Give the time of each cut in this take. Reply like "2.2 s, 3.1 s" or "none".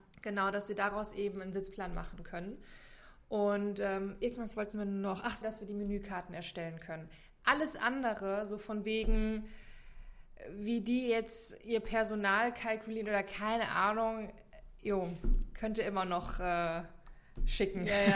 5.4 s